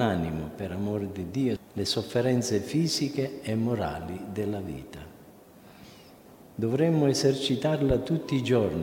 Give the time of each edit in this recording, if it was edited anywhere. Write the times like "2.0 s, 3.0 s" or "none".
1.6 s

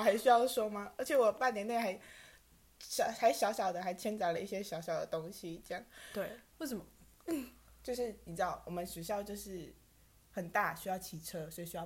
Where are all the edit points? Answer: 6.5 s

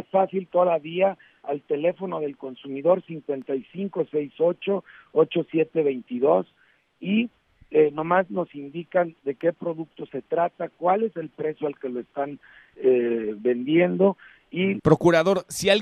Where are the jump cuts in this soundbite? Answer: 14.8 s

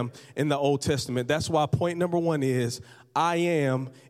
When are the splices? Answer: none

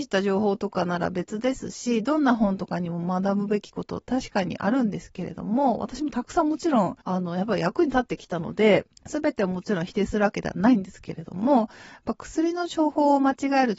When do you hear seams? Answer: 7.0 s, 9.0 s

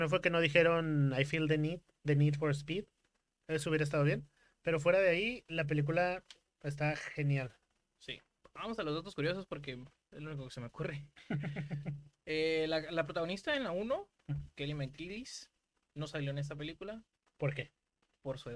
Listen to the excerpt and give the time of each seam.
none

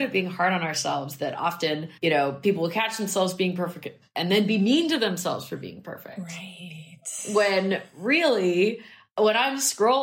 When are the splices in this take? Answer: 2.0 s

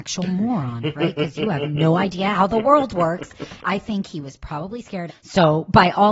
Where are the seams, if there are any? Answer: 3.6 s, 5.1 s

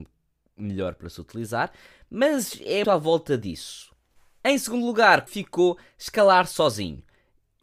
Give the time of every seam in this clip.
2.8 s, 5.3 s

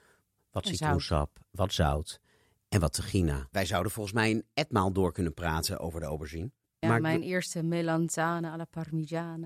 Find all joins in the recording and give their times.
3.5 s

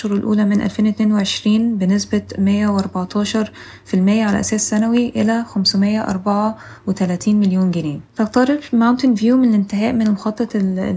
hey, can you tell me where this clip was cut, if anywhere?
8.1 s

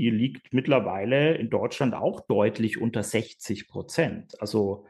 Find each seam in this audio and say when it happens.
none

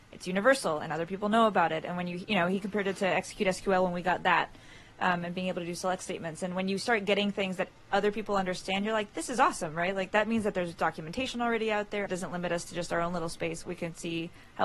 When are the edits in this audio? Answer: 12.1 s, 13.6 s

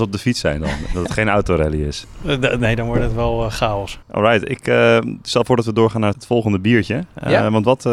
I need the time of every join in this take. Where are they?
4.0 s, 6.1 s

